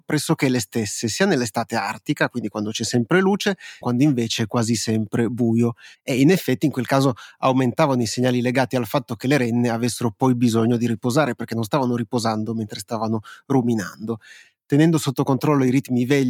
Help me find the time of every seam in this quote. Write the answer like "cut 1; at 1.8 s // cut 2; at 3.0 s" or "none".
cut 1; at 3.8 s // cut 2; at 5.9 s

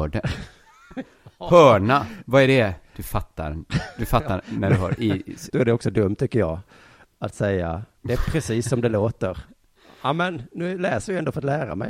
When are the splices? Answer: cut 1; at 5.5 s // cut 2; at 8.0 s

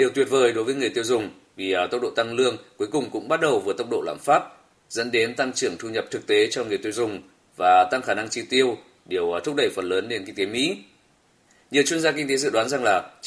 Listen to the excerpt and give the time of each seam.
none

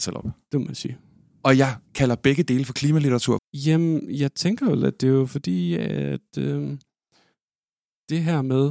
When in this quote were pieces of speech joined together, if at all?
cut 1; at 3.4 s

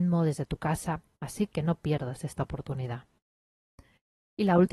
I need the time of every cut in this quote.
none

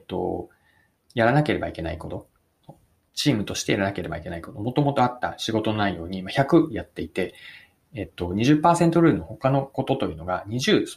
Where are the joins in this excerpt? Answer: none

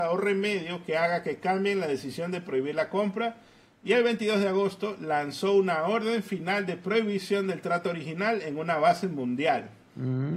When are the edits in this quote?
none

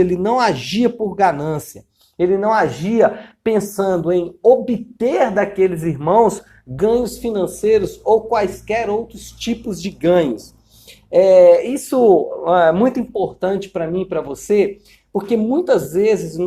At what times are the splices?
none

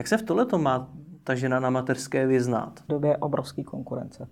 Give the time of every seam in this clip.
cut 1; at 2.9 s

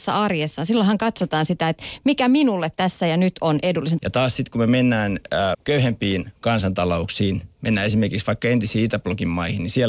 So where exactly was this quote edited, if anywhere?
cut 1; at 4.0 s // cut 2; at 5.5 s

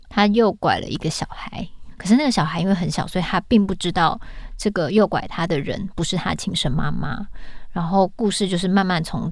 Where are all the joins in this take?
none

